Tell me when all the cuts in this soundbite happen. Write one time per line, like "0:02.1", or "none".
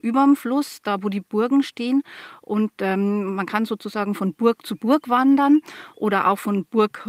none